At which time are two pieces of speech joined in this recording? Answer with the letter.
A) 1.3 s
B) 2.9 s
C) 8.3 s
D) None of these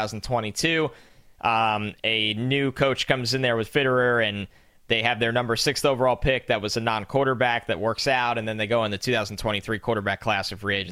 D